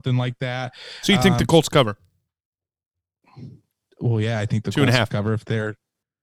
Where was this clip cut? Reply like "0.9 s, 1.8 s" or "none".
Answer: none